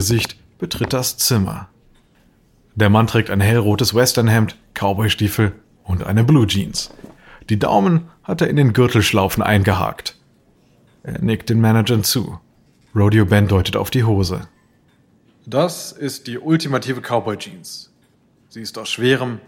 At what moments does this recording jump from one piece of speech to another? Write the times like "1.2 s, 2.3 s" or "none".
none

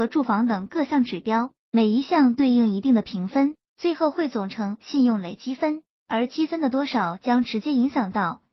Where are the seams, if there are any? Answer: none

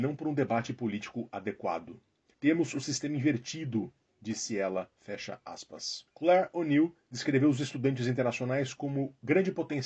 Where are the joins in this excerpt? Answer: 2.3 s, 6.1 s

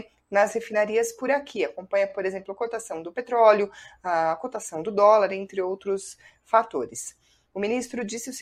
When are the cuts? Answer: none

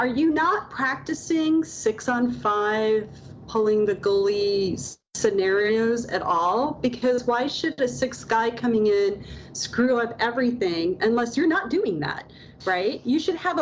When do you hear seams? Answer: 3.5 s

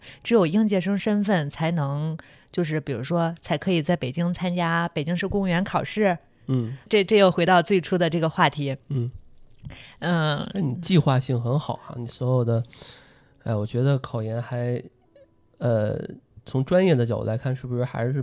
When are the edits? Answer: 6.9 s

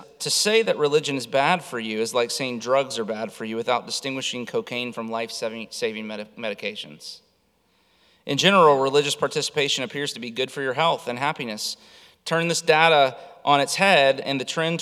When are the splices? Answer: none

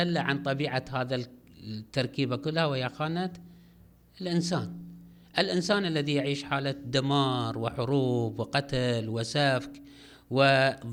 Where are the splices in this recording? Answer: none

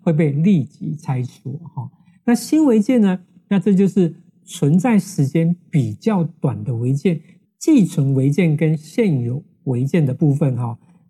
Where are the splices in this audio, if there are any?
7.4 s

